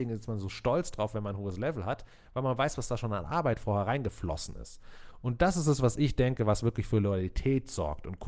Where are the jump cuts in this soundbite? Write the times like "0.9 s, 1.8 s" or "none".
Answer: none